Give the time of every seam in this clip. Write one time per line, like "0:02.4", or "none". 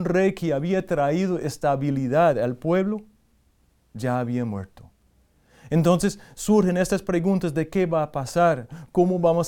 none